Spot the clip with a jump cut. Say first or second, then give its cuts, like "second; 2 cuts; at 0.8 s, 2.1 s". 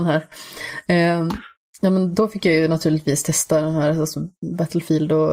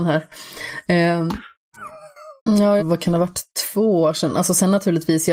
second; 2 cuts; at 1.7 s, 2.8 s